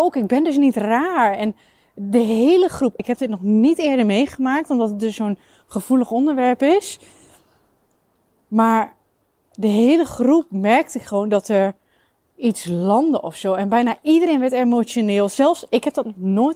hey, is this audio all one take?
no; 1 cut; at 3.0 s

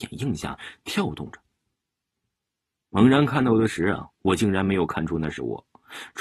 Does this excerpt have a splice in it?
no; 0 cuts

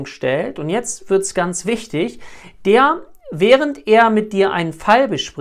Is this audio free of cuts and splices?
yes; 0 cuts

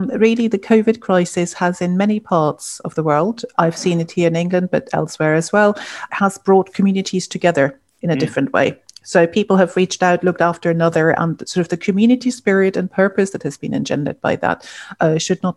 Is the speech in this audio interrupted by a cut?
yes; 2 cuts; at 3.5 s, 6.1 s

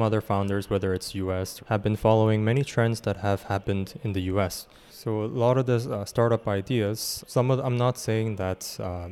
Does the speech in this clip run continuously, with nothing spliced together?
no; 3 cuts; at 1.6 s, 4.9 s, 7.2 s

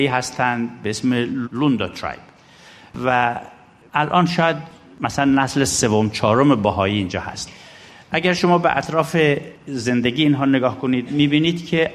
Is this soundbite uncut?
no; 1 cut; at 1.4 s

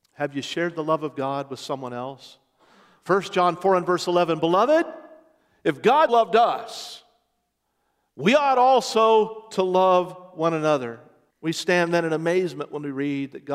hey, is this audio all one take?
no; 2 cuts; at 6.1 s, 11.3 s

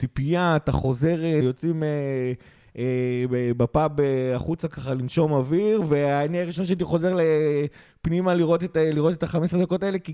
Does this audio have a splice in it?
yes; 1 cut; at 1.4 s

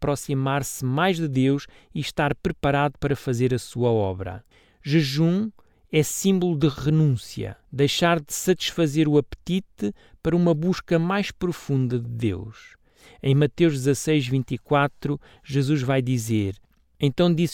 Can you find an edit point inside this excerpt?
yes; 1 cut; at 7.6 s

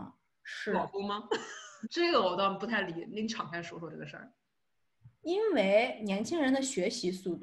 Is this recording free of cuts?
no; 1 cut; at 1.8 s

